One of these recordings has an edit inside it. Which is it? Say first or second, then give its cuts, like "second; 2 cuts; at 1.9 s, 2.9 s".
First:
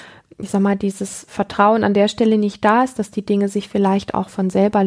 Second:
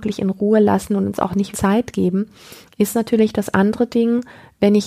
second; 1 cut; at 1.5 s